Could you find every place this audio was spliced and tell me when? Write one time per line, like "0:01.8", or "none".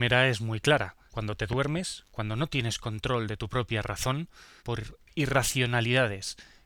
0:01.1
0:04.6